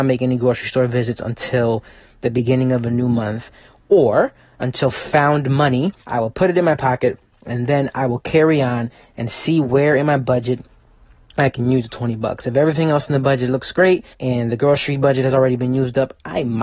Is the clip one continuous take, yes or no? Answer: no